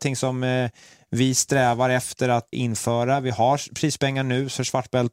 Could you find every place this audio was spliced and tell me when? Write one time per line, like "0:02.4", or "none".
0:02.5